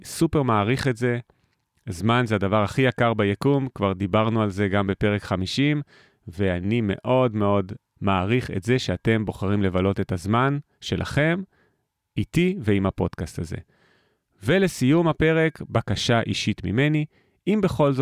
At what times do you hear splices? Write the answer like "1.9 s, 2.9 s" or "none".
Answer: none